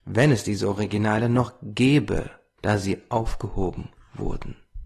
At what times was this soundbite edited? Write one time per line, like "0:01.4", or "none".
0:02.6